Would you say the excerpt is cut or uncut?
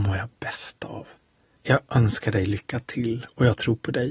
cut